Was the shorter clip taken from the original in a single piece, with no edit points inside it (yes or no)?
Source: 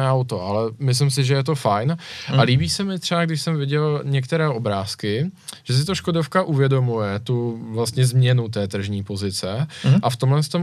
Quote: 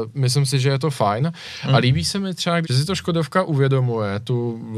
no